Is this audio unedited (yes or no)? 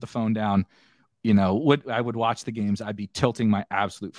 yes